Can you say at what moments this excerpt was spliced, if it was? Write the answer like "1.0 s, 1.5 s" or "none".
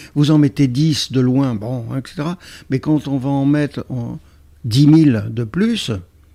none